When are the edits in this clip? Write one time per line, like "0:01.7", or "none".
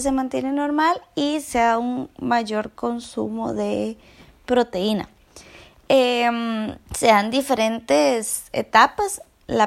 0:06.8